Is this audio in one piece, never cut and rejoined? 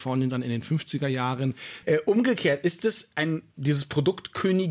no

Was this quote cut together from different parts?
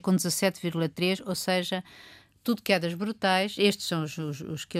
no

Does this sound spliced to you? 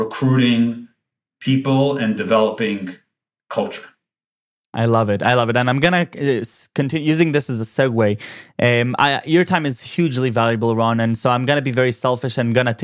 no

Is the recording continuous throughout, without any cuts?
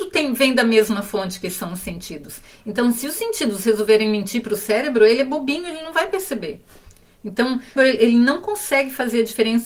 no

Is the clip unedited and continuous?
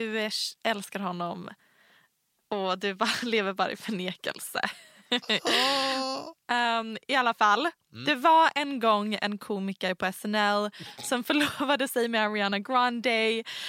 yes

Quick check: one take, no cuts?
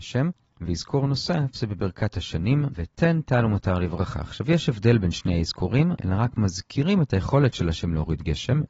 no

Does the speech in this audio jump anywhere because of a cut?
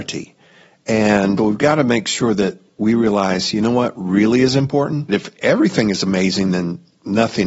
yes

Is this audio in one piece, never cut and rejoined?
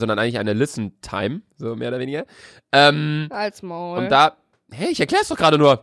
yes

